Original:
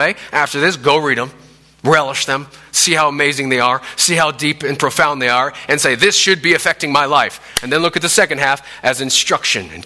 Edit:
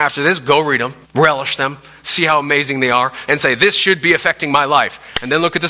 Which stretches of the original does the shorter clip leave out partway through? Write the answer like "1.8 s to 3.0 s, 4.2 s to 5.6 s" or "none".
1.4 s to 1.7 s, 4.0 s to 5.7 s